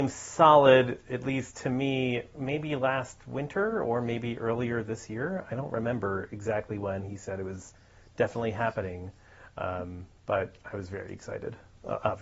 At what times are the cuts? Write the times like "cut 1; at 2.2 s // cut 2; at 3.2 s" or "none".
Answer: none